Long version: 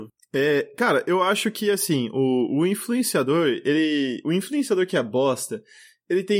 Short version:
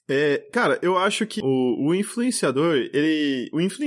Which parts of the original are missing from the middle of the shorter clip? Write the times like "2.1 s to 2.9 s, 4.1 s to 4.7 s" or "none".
1.6 s to 2.1 s